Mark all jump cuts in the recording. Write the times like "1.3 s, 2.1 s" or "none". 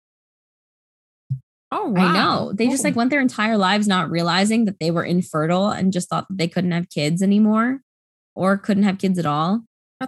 none